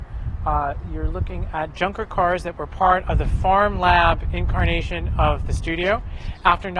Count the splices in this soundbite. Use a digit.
0